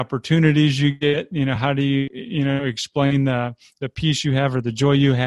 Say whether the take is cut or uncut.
uncut